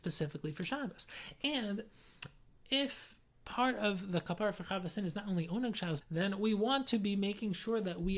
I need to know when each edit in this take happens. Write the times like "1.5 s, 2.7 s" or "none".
6.0 s